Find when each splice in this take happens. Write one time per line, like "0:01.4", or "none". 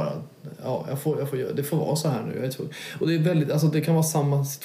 none